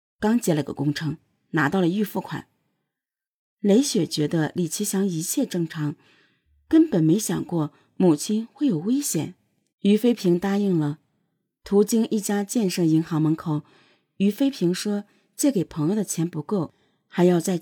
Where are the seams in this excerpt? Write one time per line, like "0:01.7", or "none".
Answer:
0:09.7